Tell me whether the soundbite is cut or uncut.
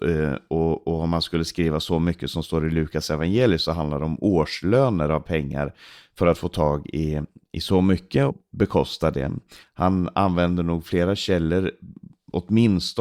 cut